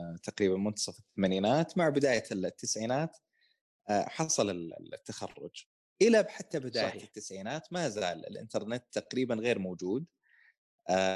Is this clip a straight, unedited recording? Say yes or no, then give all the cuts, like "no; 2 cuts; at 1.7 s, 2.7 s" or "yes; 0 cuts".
yes; 0 cuts